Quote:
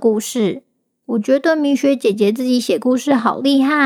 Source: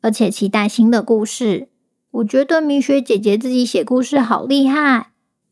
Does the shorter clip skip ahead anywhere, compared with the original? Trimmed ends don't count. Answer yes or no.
no